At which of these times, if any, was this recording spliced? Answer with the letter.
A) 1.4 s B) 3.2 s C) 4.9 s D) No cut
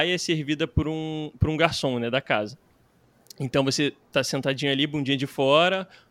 D